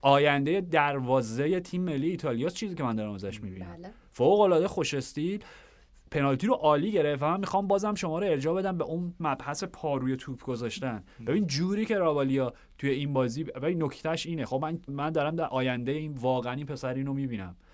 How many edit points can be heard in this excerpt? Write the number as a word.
one